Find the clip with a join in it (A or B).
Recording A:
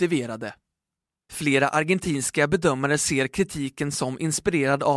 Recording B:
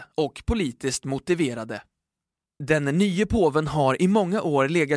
B